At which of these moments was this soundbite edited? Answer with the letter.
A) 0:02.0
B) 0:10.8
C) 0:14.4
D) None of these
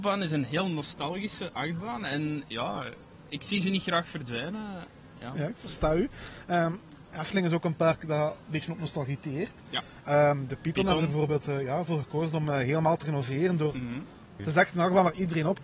C